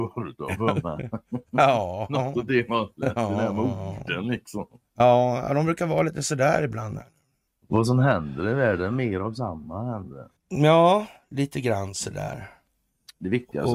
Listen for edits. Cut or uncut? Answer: cut